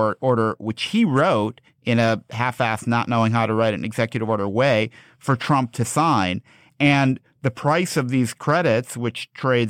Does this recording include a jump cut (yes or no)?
no